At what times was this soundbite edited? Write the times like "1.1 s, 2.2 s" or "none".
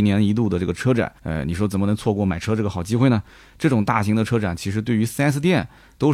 1.2 s